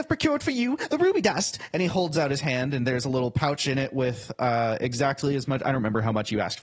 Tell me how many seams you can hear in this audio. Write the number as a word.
zero